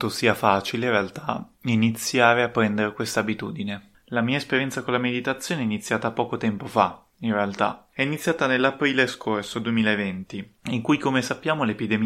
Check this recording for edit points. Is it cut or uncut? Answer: uncut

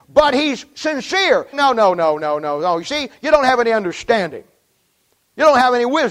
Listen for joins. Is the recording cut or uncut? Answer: cut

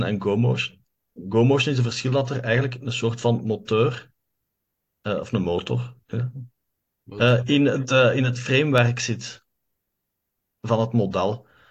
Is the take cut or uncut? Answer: uncut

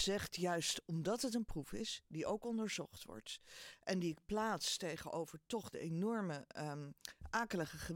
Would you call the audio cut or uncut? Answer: uncut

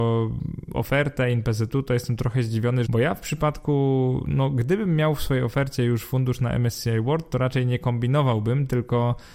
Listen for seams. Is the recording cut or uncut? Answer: cut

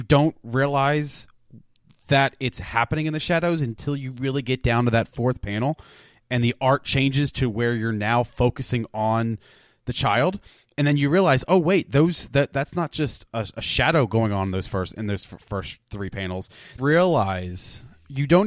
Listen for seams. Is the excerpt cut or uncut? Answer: cut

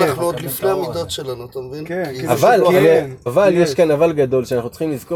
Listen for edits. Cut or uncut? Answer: cut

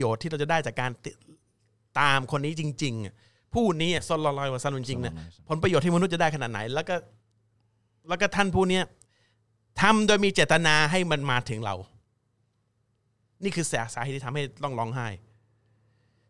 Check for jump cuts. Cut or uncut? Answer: uncut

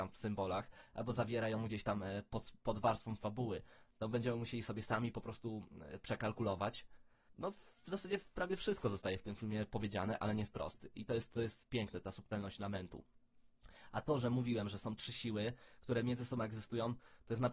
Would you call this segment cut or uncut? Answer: uncut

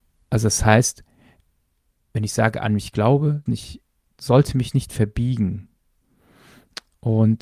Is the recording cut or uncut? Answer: cut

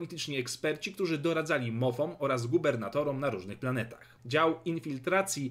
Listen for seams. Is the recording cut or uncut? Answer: uncut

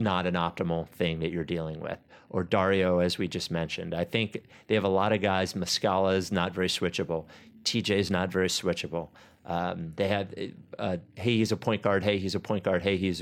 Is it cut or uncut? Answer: cut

